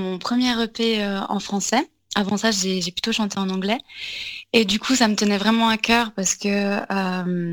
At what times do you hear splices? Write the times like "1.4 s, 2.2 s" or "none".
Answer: none